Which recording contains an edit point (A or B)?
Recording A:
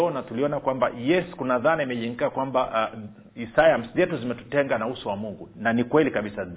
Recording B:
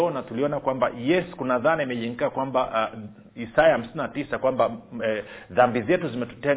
A